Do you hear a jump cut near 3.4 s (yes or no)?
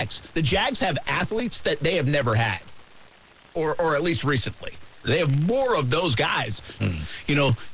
no